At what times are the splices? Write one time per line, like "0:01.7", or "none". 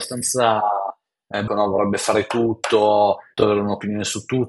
0:01.5
0:03.4